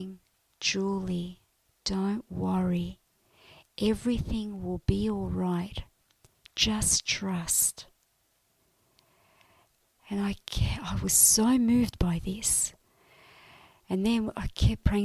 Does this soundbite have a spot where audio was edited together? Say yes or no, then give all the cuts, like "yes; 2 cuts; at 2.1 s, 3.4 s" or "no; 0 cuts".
no; 0 cuts